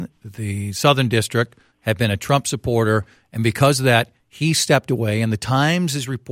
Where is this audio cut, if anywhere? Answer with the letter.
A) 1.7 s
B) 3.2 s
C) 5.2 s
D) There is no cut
A